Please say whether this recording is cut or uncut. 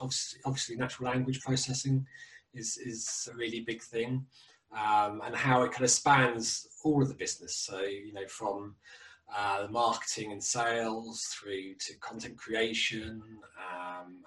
cut